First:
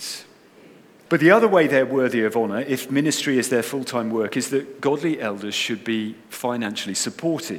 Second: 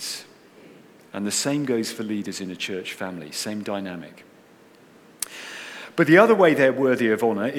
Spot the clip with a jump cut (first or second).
first